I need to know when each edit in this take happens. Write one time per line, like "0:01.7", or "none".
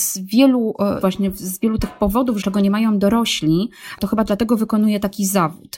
0:01.0
0:02.4